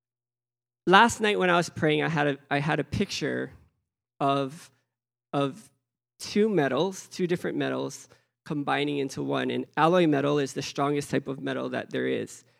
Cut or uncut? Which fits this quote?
cut